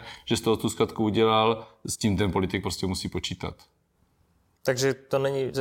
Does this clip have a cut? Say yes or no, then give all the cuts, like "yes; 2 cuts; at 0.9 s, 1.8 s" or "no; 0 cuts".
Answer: no; 0 cuts